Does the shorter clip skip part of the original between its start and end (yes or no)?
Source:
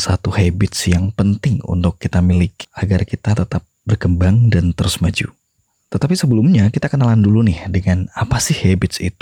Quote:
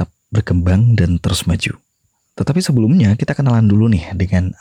no